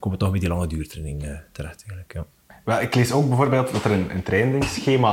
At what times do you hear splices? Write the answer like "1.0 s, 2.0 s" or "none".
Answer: 2.5 s